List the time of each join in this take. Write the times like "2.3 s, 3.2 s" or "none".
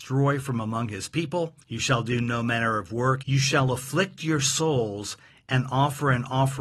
1.6 s, 3.2 s